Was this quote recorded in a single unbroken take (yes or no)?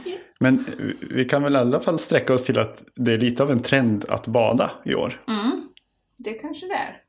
yes